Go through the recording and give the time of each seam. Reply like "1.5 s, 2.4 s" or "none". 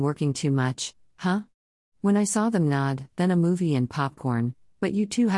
3.1 s